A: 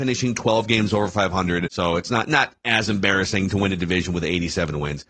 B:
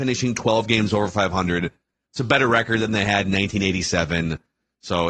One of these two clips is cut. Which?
A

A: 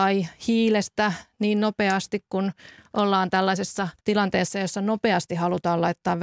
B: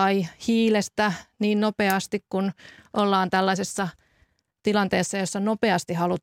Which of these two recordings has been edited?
A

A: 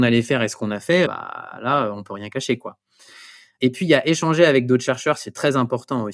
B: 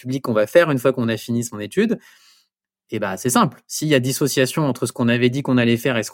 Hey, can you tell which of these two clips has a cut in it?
A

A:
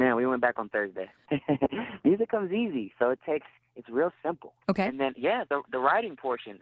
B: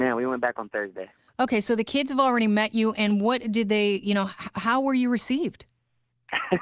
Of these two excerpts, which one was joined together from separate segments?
A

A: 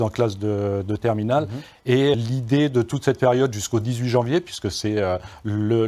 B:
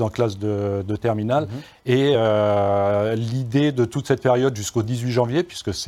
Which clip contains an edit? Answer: A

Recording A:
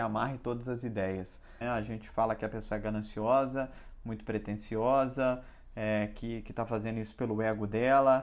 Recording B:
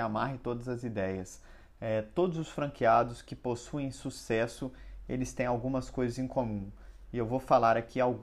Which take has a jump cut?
A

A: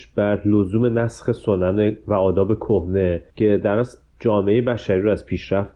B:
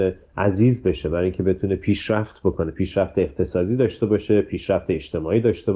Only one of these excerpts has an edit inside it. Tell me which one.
A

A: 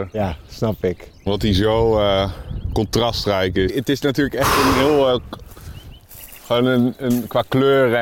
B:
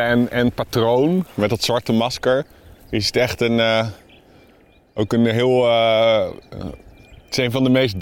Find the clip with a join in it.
A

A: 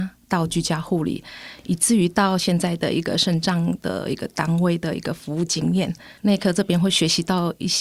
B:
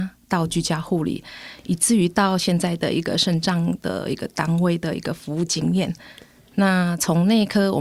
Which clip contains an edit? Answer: A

